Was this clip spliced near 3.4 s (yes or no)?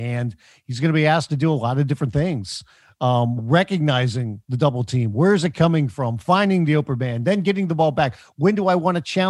yes